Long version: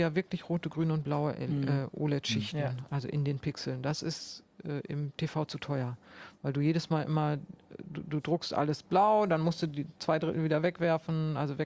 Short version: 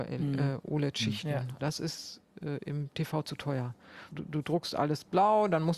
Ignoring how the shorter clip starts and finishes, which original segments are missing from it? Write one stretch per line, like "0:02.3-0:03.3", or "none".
0:02.9-0:03.8
0:06.3-0:07.9